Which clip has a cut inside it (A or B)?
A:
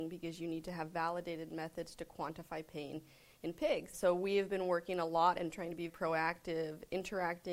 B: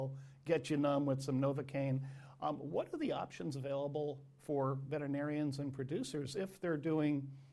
A